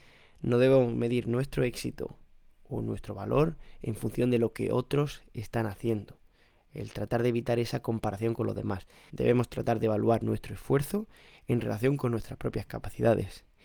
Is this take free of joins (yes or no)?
no